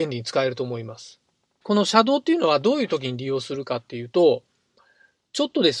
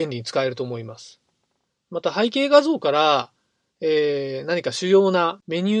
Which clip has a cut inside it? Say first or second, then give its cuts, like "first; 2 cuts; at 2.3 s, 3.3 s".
first; 1 cut; at 1.6 s